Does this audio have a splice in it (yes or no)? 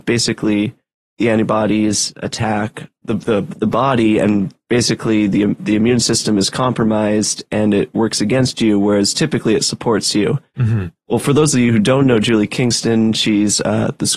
no